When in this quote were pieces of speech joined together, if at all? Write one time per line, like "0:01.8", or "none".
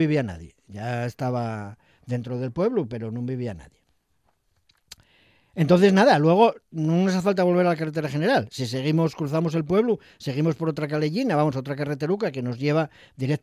none